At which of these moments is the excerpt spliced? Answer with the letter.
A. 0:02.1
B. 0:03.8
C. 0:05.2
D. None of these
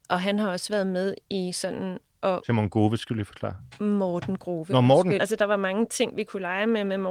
C